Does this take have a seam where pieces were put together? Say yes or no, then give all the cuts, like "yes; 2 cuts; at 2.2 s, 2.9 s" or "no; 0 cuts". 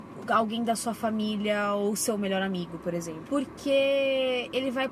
yes; 1 cut; at 3.3 s